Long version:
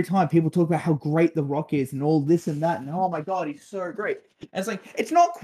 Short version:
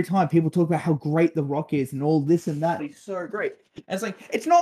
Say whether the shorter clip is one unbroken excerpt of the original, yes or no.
no